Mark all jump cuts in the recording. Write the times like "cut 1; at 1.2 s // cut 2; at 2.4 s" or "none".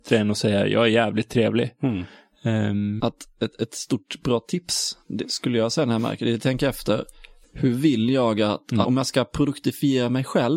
cut 1; at 3.0 s // cut 2; at 7.4 s // cut 3; at 8.8 s